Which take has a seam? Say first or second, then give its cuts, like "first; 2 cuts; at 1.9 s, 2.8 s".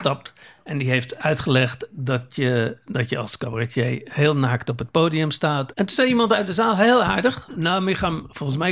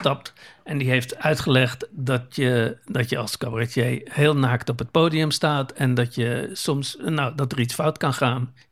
first; 2 cuts; at 5.7 s, 7.5 s